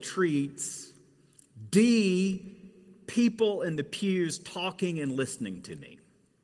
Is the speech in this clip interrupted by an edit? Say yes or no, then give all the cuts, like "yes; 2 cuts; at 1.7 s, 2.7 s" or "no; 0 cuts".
no; 0 cuts